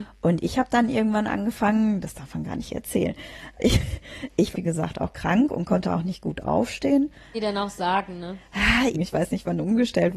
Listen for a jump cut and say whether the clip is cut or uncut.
cut